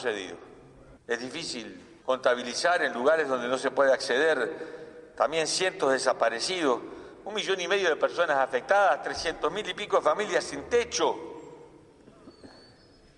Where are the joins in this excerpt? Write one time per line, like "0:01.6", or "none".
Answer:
0:01.0
0:02.0